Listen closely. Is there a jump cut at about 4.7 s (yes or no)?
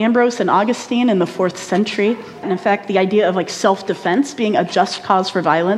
no